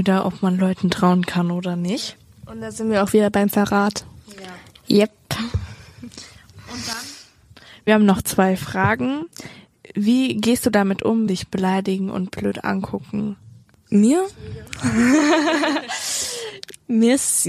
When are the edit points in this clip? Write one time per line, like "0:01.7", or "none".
0:11.3

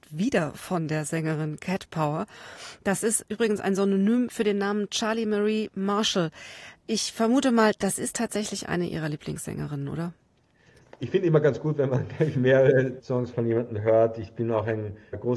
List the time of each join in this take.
none

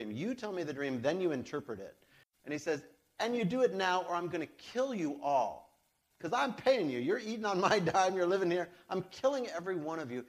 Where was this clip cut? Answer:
0:02.2

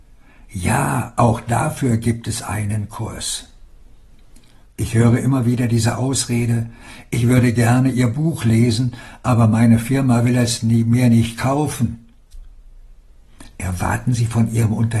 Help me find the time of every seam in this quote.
0:04.6

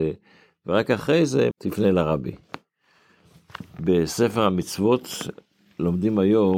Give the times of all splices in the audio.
0:01.5

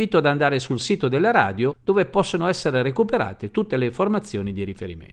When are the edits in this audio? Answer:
none

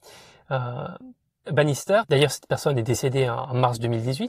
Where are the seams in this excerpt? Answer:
0:01.5

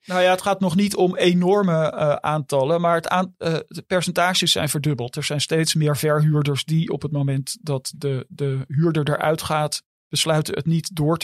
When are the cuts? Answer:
none

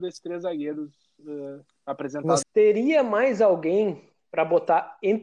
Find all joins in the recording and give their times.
0:02.4

